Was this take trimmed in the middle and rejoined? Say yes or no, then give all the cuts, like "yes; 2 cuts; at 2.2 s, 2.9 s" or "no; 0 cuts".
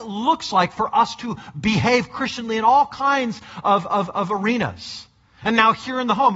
no; 0 cuts